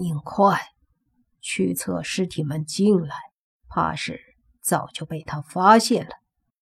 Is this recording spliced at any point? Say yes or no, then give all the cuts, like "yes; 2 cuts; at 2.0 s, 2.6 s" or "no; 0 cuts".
yes; 1 cut; at 3.6 s